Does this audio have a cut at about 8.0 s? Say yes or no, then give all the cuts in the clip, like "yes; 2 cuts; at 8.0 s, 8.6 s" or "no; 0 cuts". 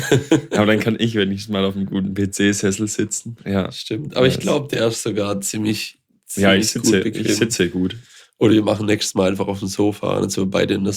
no; 1 cut; at 3.4 s